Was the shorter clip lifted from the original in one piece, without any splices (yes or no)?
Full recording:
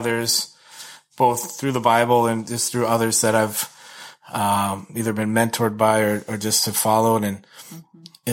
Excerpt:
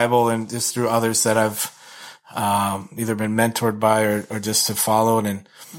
yes